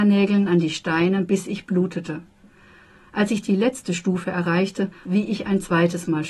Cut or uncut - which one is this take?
cut